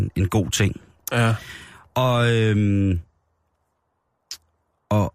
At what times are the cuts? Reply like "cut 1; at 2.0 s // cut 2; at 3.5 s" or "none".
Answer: none